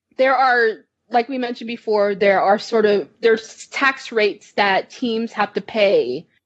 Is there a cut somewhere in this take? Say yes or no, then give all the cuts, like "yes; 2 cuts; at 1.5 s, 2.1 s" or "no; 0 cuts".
no; 0 cuts